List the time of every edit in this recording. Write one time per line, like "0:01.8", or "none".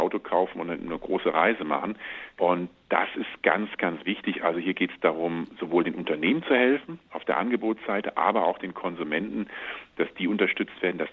0:02.4